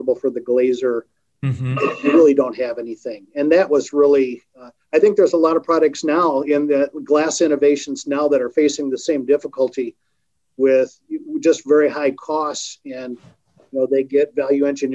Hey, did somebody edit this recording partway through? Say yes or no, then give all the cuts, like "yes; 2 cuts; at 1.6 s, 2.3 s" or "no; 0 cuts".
no; 0 cuts